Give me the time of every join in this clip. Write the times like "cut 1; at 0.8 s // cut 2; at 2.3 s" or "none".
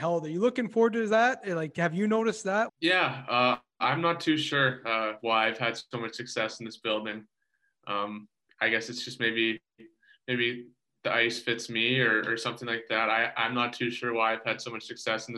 cut 1; at 2.7 s